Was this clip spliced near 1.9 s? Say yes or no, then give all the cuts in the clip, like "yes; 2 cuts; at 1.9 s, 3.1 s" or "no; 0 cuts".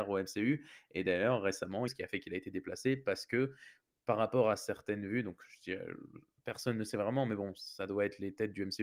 yes; 1 cut; at 1.9 s